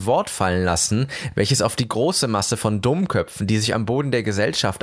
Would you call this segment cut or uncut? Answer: uncut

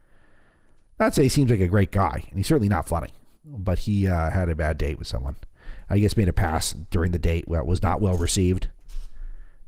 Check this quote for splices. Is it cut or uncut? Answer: cut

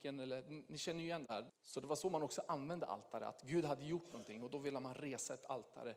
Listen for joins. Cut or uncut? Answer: cut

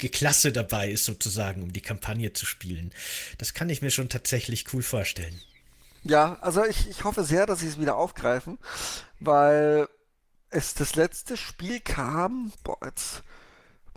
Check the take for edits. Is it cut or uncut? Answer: uncut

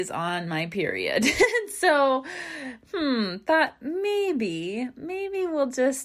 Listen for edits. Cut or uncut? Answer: uncut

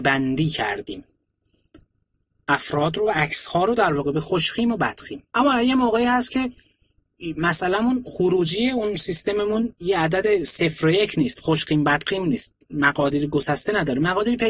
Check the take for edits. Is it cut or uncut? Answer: cut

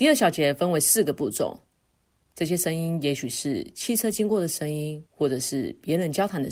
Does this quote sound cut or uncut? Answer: cut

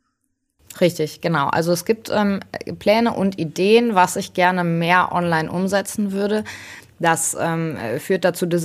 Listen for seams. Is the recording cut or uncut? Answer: uncut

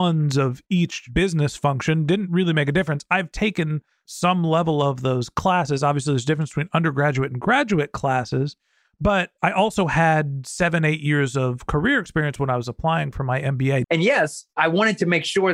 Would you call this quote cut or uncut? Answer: cut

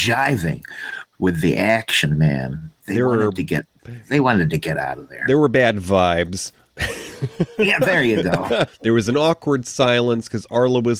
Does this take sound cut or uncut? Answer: cut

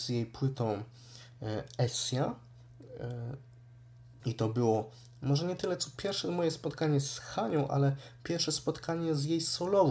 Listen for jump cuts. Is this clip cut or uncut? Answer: cut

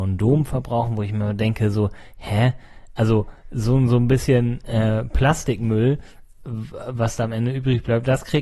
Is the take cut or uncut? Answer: uncut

